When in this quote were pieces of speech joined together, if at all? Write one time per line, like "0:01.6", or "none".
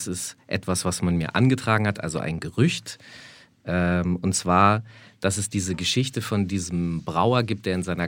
none